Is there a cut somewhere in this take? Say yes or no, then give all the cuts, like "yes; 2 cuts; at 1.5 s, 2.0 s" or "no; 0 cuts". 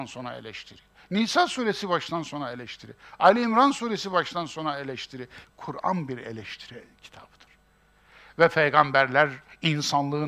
yes; 1 cut; at 5.4 s